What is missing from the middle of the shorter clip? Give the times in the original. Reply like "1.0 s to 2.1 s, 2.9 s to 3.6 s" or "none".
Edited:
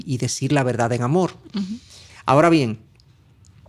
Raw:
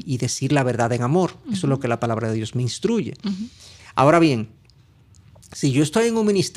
1.5 s to 3.2 s